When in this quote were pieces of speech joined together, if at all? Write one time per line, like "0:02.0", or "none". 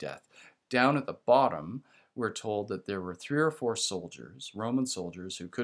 none

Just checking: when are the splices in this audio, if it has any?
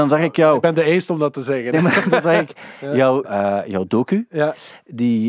0:03.2

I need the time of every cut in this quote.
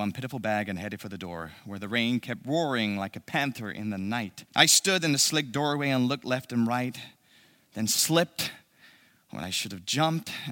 0:04.5

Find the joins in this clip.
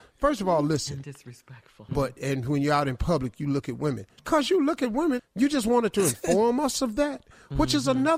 0:01.9
0:04.2
0:05.2

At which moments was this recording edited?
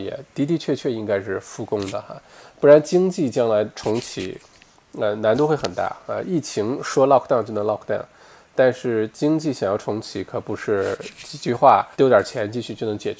0:11.9

